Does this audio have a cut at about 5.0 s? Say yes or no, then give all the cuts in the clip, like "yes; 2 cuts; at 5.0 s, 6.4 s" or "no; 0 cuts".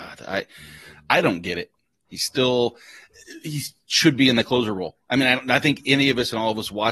no; 1 cut; at 2.0 s